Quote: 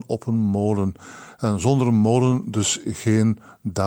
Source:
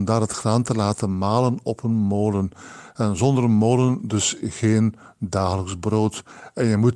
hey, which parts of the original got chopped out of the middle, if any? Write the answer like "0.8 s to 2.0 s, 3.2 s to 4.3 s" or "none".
none